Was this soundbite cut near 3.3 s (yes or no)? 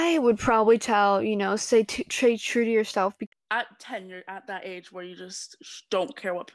yes